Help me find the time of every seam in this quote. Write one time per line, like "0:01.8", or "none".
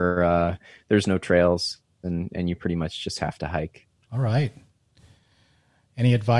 0:04.0